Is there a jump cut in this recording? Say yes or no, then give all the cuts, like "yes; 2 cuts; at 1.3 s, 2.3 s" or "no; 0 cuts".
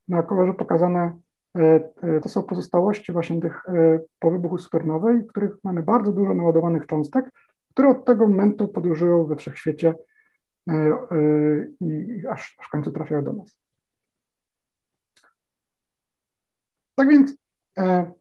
yes; 1 cut; at 2.2 s